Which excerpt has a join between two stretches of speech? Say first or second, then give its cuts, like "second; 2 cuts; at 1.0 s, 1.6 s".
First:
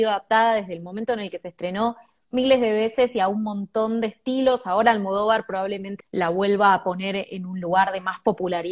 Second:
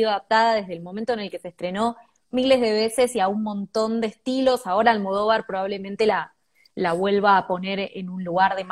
first; 1 cut; at 6.0 s